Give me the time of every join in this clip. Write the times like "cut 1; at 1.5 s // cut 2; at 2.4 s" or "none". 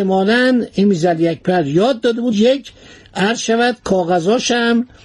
none